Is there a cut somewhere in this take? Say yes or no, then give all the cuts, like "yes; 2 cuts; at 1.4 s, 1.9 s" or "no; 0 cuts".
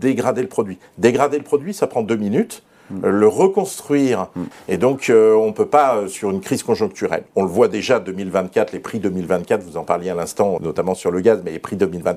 yes; 2 cuts; at 4.5 s, 10.6 s